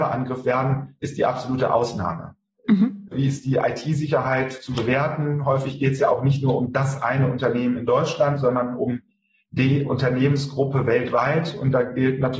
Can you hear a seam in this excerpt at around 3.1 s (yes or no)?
yes